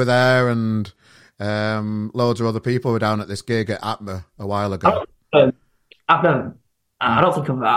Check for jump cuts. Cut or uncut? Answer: uncut